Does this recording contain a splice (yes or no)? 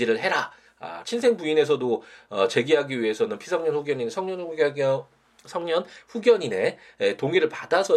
yes